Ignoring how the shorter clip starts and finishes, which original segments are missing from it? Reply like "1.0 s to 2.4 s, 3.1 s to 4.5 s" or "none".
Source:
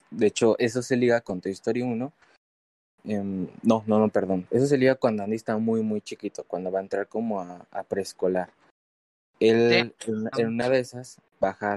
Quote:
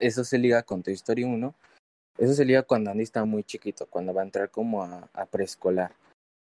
2.7 s to 4.5 s, 5.6 s to 5.8 s